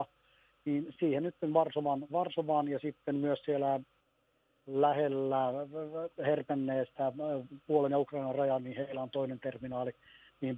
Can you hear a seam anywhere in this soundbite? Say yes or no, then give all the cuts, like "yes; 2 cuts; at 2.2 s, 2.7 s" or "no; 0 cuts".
no; 0 cuts